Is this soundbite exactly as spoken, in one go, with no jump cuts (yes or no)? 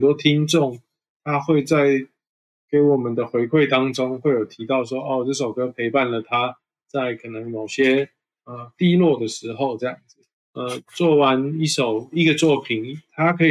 no